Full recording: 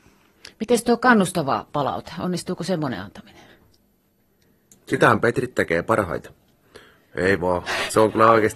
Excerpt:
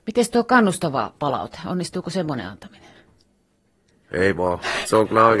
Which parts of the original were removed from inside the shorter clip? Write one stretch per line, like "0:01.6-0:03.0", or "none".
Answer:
0:04.5-0:07.1